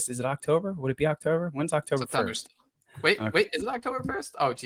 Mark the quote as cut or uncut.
uncut